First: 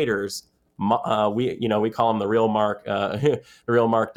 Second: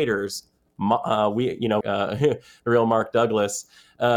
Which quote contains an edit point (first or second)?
second